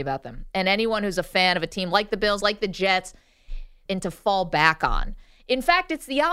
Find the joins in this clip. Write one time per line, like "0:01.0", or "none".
0:02.4
0:03.9

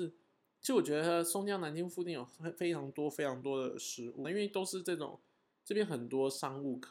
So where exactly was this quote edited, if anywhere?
0:04.2

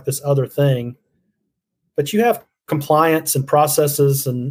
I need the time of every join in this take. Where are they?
none

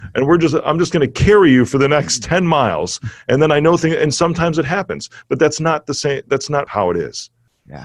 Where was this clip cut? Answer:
0:06.7

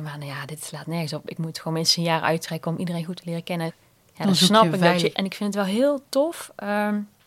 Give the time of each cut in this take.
0:03.7
0:05.1

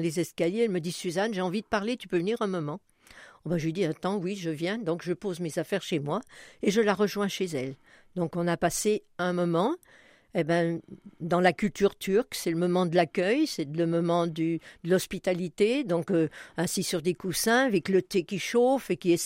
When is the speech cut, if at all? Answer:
none

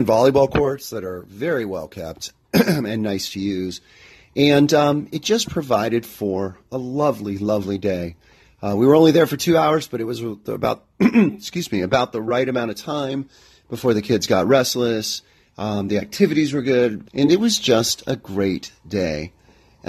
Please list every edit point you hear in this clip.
0:17.0

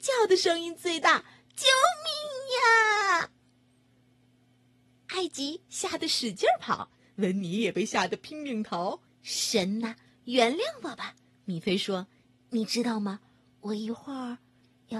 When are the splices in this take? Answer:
0:09.1

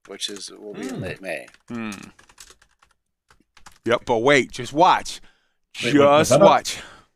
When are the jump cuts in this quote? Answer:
0:04.0

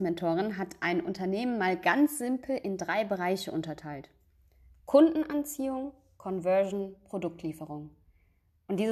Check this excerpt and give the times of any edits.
none

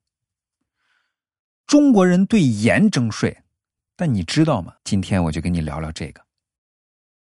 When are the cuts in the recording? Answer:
0:04.8

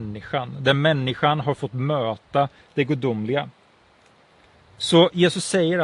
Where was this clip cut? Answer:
none

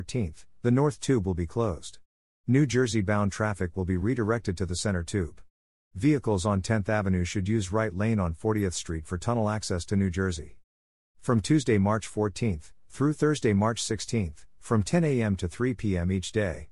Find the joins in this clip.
0:05.8
0:10.9

